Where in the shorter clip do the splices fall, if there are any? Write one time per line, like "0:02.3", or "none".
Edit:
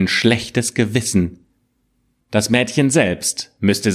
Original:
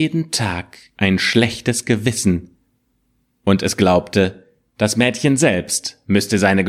0:02.2